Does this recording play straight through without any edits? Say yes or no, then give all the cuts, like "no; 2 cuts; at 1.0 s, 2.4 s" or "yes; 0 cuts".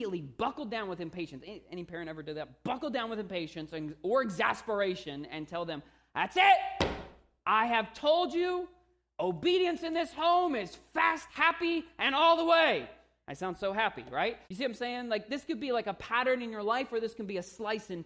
no; 1 cut; at 14.4 s